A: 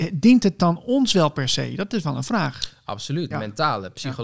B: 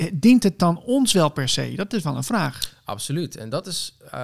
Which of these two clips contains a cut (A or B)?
A